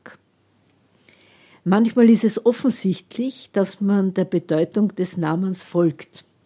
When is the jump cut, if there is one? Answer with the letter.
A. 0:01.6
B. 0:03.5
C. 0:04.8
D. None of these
D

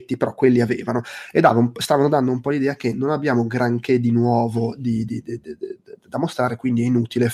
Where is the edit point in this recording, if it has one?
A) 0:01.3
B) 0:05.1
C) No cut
C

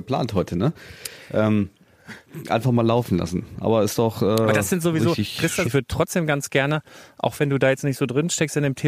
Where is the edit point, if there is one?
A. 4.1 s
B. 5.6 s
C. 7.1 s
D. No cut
B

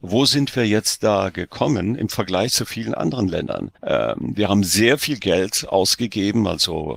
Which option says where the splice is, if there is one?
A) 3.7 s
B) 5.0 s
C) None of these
A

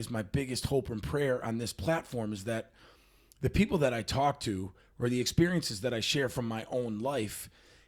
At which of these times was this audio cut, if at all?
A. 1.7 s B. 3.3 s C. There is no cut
C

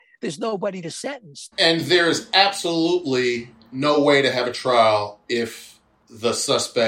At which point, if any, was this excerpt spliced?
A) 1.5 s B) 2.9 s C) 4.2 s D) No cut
A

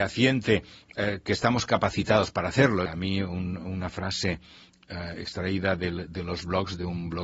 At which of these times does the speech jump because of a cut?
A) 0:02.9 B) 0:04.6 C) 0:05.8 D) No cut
A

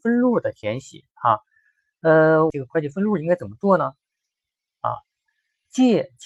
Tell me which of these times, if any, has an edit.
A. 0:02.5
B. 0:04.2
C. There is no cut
A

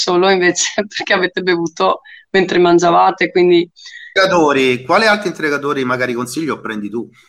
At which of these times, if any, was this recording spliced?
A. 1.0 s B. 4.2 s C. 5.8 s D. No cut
B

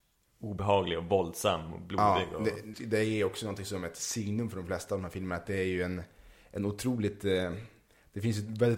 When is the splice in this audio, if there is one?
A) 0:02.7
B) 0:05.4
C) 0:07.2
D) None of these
A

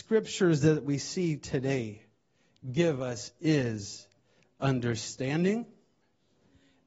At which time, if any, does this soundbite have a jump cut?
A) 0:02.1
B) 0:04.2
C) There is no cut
C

